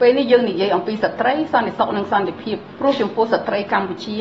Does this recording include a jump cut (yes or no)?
no